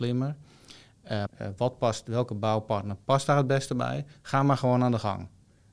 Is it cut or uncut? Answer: cut